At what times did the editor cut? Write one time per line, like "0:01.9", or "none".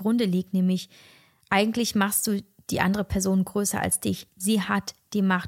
none